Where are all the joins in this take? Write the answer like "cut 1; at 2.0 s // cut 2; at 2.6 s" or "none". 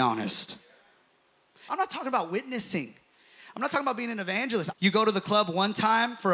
cut 1; at 1.7 s // cut 2; at 4.7 s